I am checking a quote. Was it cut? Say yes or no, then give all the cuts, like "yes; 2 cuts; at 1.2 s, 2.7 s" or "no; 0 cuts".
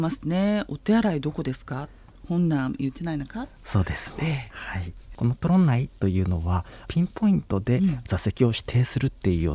no; 0 cuts